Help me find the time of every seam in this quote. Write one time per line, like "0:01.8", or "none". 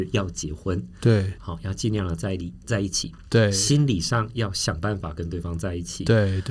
0:01.4